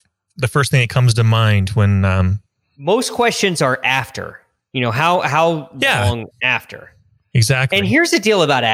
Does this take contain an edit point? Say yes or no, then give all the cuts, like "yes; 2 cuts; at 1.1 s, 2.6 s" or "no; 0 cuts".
no; 0 cuts